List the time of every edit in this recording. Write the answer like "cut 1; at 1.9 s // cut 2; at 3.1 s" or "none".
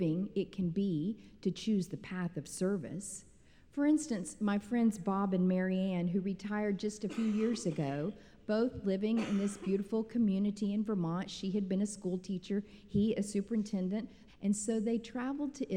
cut 1; at 14.3 s